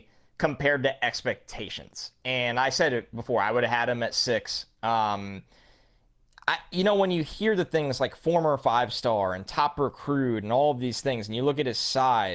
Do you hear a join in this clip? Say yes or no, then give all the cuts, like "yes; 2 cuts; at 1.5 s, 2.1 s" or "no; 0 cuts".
no; 0 cuts